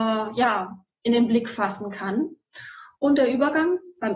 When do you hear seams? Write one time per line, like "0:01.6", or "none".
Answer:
none